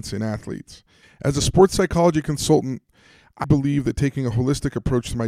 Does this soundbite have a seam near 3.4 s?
yes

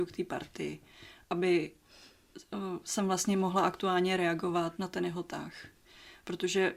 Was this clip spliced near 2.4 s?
no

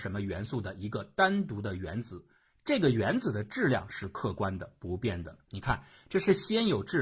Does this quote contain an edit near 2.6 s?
no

